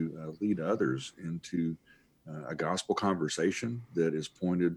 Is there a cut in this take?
no; 0 cuts

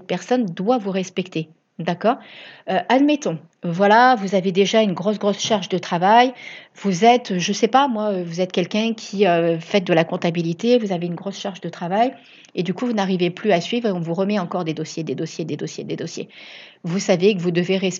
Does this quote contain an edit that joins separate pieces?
no; 0 cuts

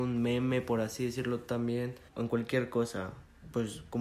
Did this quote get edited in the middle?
yes; 1 cut; at 2.1 s

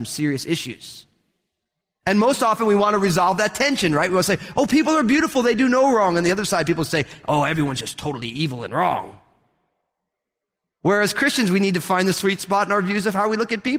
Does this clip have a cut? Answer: no; 0 cuts

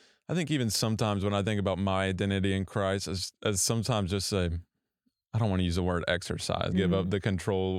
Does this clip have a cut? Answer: yes; 1 cut; at 6.7 s

